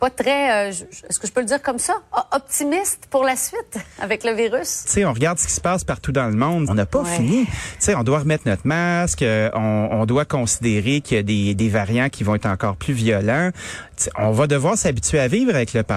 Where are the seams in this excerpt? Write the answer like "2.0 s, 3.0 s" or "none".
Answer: 4.8 s, 6.7 s